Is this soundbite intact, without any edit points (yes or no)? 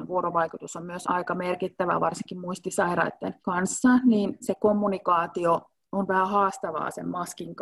no